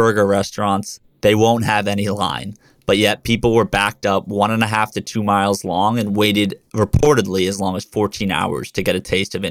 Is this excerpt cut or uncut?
uncut